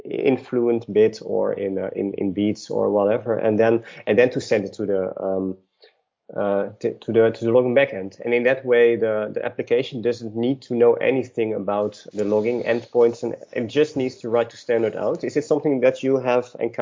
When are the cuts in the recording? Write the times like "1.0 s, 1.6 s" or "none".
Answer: 12.1 s